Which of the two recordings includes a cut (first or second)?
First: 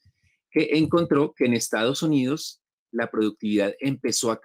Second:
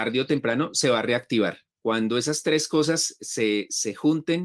second